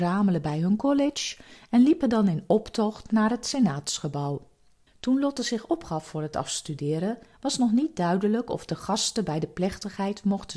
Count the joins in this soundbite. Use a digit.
1